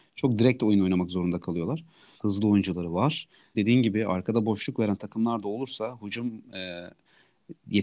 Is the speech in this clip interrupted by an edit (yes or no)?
yes